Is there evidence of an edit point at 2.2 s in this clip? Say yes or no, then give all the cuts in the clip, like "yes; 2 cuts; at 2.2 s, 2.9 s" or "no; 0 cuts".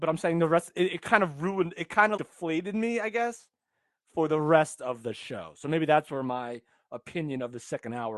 yes; 1 cut; at 2.2 s